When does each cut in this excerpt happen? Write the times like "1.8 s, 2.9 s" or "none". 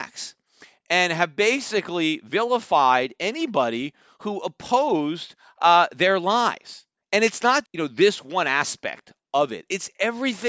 7.6 s